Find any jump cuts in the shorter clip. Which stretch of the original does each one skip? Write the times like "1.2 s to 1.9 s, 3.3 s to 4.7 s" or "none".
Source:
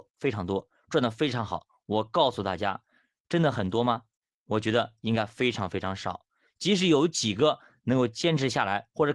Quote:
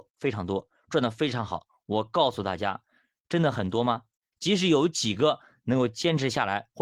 4.3 s to 6.5 s